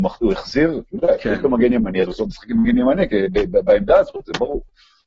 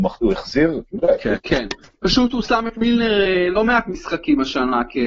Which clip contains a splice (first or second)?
second